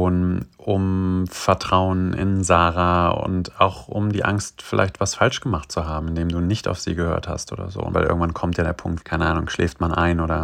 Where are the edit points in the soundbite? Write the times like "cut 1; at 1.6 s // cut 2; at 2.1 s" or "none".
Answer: cut 1; at 7.9 s // cut 2; at 9.0 s